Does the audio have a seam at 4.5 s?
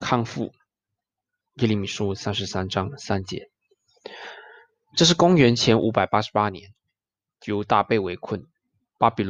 no; 1 cut; at 1.4 s

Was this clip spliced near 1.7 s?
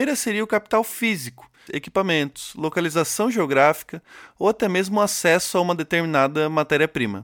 yes; 1 cut; at 1.7 s

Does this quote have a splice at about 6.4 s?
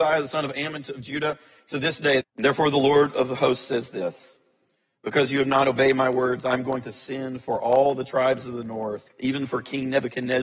no; 2 cuts; at 2.2 s, 9.1 s

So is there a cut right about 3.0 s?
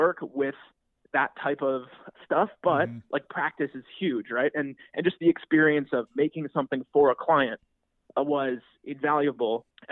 no; 0 cuts

